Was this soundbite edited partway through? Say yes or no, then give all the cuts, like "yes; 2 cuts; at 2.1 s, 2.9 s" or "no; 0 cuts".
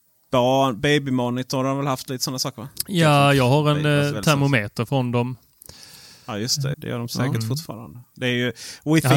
yes; 1 cut; at 6.7 s